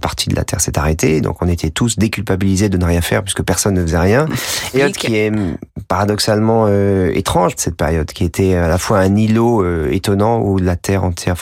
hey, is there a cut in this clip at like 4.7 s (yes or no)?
yes